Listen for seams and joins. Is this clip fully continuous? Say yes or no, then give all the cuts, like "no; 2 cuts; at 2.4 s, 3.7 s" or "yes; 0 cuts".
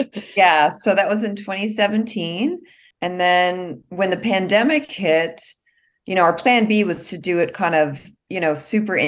no; 1 cut; at 2.9 s